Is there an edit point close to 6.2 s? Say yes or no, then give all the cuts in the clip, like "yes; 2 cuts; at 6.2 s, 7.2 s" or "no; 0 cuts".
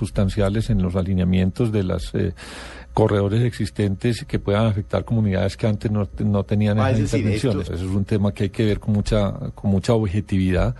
no; 1 cut; at 7.7 s